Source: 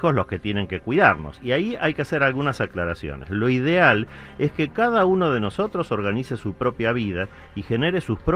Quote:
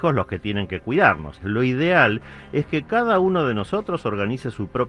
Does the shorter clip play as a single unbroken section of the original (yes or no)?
no